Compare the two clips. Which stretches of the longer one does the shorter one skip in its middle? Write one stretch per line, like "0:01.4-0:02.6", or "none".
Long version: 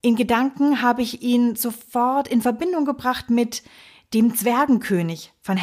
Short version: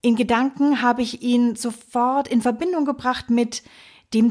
none